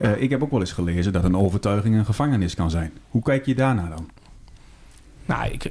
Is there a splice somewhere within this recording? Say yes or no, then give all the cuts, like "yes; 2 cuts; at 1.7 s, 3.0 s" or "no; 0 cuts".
no; 0 cuts